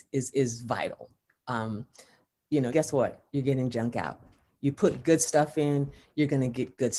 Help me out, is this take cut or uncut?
cut